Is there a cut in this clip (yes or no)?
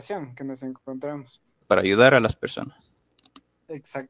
yes